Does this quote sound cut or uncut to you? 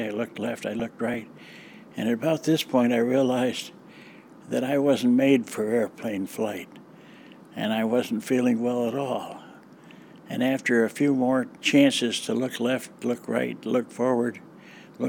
uncut